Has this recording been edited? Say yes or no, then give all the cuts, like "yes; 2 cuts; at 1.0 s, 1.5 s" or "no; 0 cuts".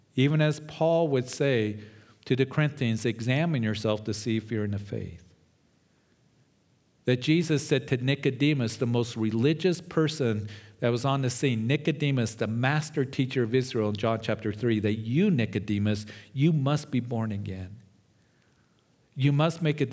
no; 0 cuts